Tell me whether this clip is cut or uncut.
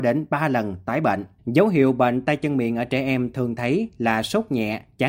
cut